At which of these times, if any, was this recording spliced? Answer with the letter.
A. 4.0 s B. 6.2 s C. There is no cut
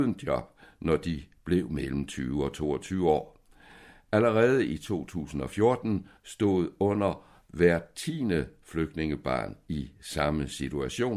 B